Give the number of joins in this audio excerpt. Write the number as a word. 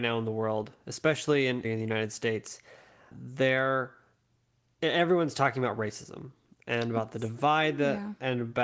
two